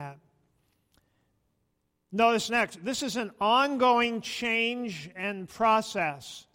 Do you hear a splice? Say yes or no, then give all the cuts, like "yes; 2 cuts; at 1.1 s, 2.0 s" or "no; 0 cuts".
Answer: no; 0 cuts